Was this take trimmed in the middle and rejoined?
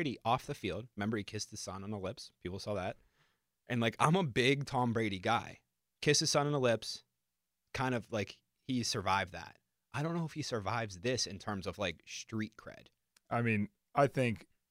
no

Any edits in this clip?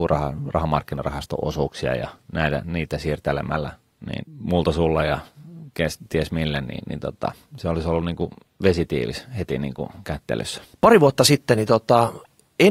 yes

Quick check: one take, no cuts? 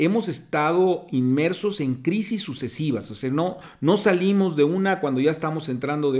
yes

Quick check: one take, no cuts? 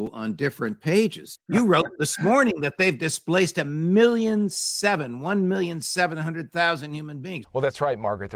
no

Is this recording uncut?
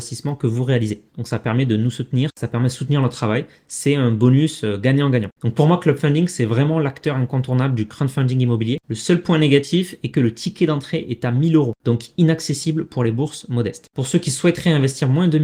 no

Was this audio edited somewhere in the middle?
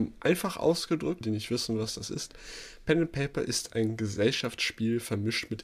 yes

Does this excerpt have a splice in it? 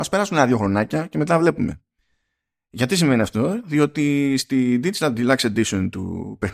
no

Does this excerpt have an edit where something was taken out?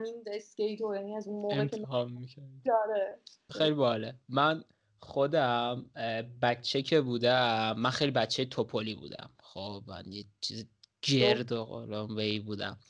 yes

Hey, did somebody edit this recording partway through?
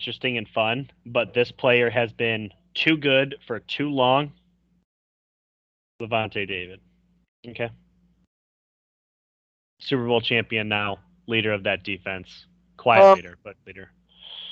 yes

